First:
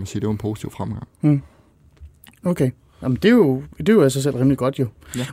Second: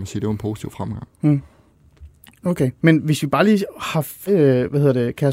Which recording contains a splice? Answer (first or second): second